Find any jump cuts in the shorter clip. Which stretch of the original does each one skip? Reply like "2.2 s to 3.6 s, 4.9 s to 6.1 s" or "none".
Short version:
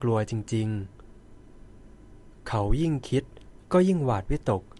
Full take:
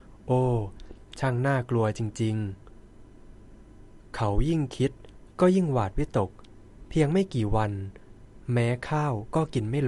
none

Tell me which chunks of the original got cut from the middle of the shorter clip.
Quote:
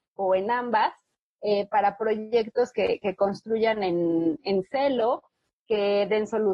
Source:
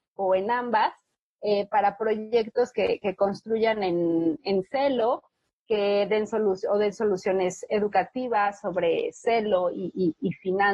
none

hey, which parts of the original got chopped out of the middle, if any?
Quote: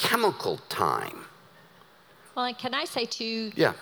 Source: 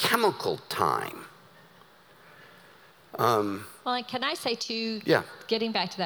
2.3 s to 3.7 s

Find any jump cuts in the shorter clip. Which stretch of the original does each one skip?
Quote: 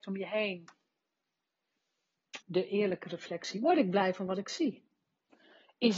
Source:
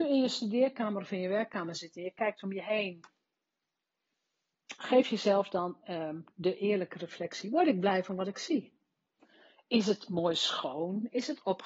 4.8 s to 6.3 s

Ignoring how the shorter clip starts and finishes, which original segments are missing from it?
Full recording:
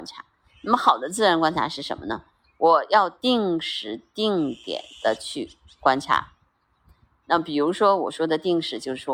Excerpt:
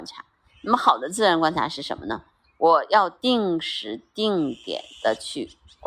none

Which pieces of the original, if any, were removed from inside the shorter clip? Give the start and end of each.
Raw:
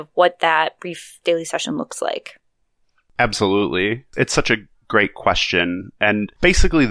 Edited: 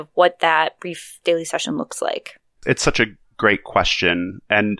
2.6 s to 4.1 s

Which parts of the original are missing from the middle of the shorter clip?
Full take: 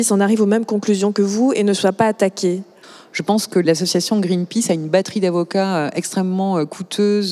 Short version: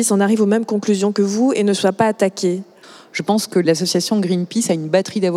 none

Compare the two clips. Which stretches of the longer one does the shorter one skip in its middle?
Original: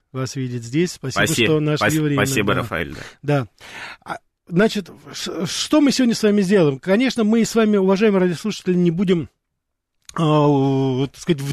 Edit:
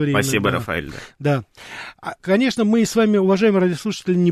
4.2 s to 6.8 s

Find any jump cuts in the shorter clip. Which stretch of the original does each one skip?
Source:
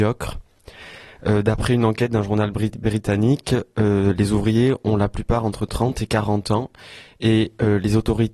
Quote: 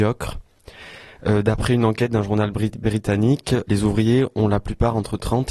3.7 s to 4.2 s

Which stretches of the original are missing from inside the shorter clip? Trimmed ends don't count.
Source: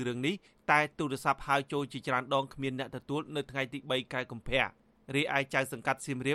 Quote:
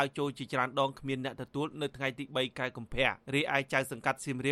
4.8 s to 5.0 s

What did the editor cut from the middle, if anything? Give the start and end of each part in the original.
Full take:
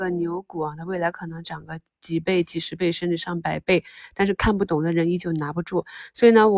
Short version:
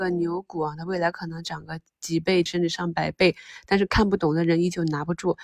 2.5 s to 2.9 s

